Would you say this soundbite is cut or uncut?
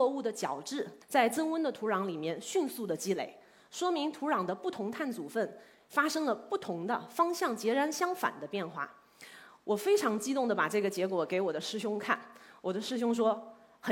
cut